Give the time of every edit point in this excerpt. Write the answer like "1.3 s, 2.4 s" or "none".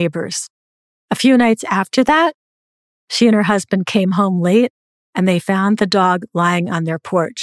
none